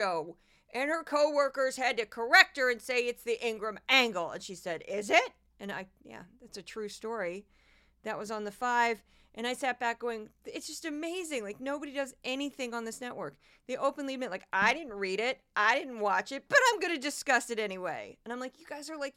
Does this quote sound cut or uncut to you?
uncut